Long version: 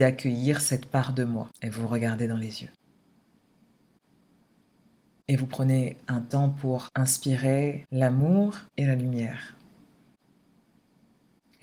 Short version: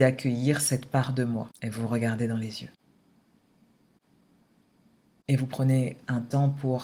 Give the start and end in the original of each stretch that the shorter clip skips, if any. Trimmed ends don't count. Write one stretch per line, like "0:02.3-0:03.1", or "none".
none